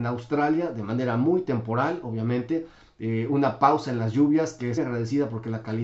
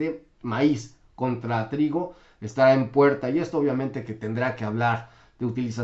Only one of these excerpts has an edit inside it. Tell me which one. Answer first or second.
first